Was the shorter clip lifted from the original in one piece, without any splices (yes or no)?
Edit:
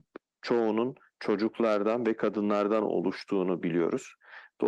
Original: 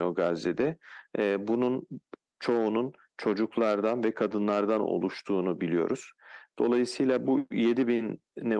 yes